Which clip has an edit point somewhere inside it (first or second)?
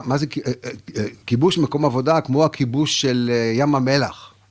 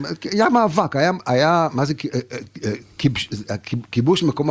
first